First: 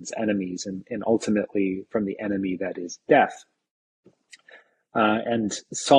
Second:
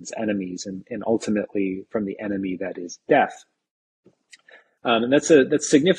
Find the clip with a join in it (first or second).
second